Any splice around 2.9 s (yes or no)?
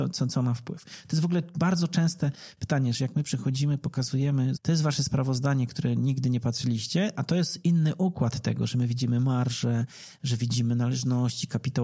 yes